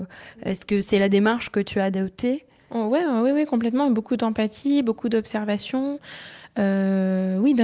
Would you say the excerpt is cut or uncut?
uncut